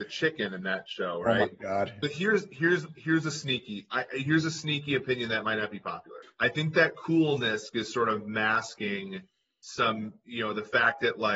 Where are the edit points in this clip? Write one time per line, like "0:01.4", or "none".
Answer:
0:02.0
0:06.2